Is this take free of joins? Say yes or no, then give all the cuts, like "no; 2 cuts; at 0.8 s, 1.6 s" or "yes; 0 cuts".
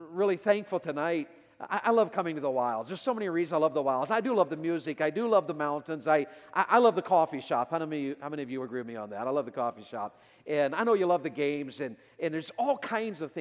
yes; 0 cuts